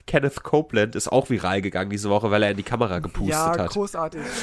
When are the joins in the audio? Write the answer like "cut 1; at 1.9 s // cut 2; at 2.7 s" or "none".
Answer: none